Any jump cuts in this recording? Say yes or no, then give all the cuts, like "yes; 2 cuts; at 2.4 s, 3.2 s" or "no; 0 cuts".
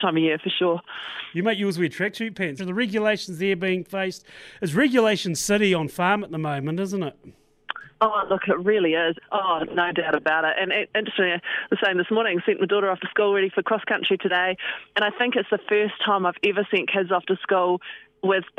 yes; 2 cuts; at 2.6 s, 9.1 s